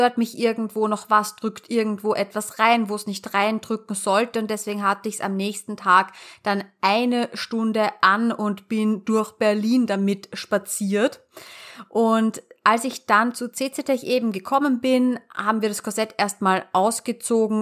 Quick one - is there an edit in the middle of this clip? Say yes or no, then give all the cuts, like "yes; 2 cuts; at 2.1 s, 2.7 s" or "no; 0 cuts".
no; 0 cuts